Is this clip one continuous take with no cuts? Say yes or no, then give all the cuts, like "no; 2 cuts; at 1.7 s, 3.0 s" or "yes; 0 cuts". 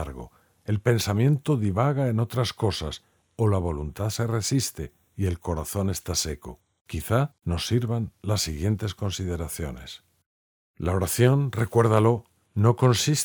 yes; 0 cuts